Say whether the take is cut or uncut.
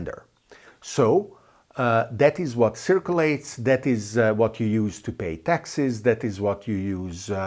uncut